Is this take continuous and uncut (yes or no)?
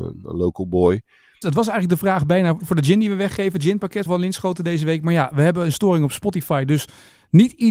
no